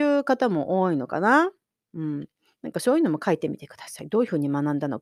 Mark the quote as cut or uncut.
uncut